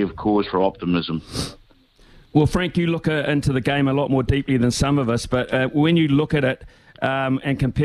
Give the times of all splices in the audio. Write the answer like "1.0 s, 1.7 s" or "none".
none